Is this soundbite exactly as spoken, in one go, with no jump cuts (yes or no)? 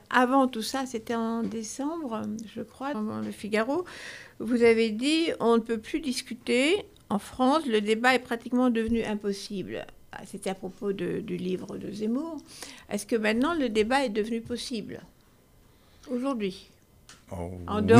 no